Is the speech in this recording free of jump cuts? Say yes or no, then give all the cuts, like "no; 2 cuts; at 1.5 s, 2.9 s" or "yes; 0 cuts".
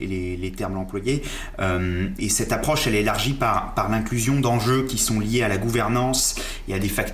no; 1 cut; at 2.2 s